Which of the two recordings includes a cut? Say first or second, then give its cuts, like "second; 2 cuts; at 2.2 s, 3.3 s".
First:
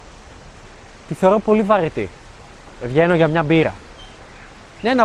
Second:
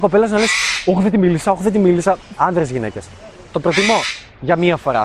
second; 2 cuts; at 2.4 s, 3.5 s